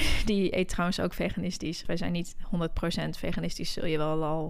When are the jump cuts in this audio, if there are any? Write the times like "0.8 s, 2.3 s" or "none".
1.9 s